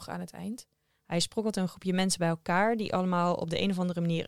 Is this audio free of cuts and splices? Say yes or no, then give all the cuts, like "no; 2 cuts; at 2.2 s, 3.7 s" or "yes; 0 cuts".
no; 1 cut; at 0.9 s